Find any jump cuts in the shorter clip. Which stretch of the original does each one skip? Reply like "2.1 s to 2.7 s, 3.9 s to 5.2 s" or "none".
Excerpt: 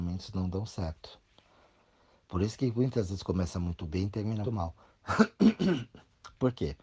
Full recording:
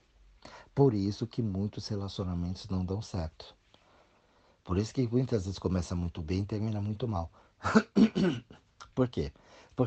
6.8 s to 7.0 s